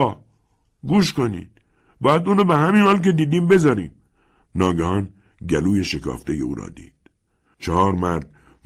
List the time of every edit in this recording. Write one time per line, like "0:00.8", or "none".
0:04.4
0:07.5